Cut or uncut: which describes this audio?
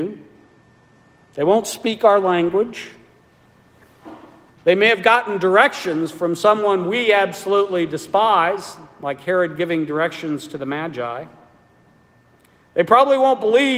uncut